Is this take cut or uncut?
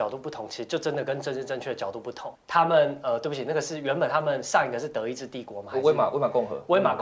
cut